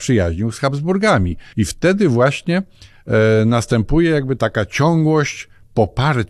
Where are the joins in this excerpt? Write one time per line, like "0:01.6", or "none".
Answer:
0:01.5
0:04.4